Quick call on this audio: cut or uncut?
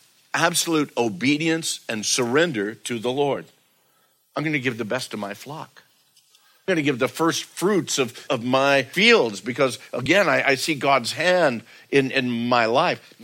uncut